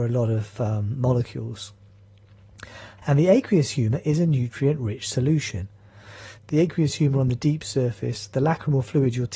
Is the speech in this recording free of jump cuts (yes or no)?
no